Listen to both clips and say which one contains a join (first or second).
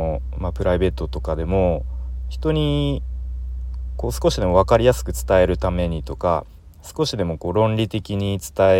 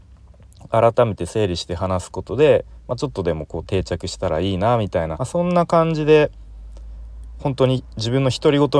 second